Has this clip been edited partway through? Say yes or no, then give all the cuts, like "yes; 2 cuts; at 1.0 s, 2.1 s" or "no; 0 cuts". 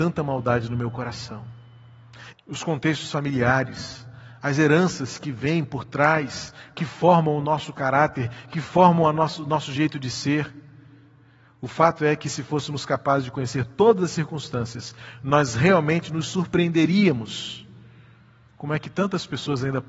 yes; 1 cut; at 2.3 s